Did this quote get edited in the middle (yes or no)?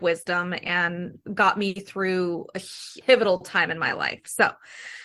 yes